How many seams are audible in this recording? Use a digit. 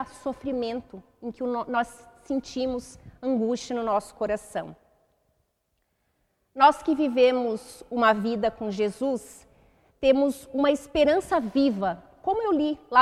0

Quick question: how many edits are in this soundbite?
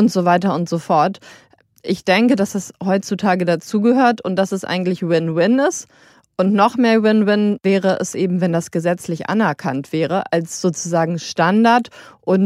0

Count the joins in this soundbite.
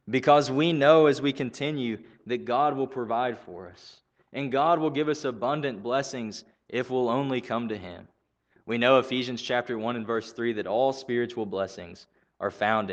0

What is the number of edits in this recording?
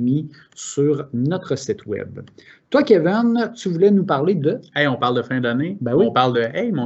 0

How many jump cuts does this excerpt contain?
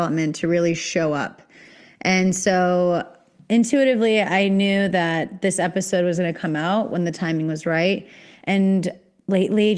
0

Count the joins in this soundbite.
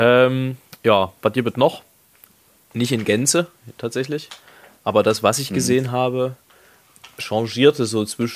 1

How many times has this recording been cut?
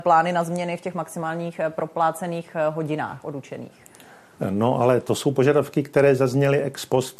0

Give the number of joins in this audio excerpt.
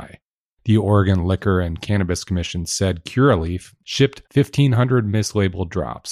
1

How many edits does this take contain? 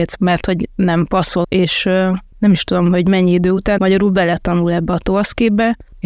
2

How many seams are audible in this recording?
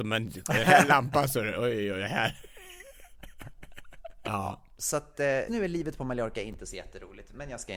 2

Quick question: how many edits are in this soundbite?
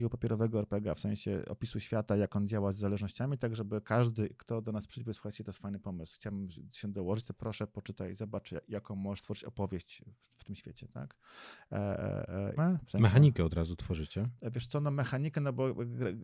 1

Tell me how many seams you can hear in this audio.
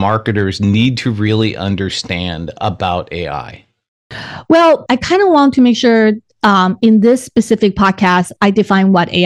1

